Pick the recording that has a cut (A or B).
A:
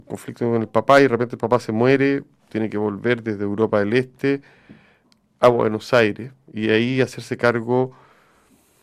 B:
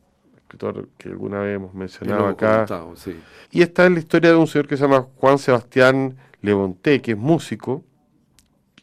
B